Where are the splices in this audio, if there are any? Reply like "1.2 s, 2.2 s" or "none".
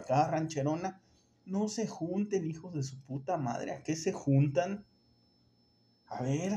none